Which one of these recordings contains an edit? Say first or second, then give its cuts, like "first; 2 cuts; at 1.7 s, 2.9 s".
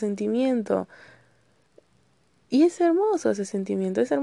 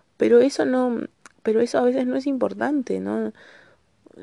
first; 1 cut; at 2.8 s